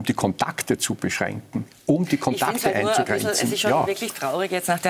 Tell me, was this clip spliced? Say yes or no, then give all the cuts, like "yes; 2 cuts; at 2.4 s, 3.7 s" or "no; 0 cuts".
no; 0 cuts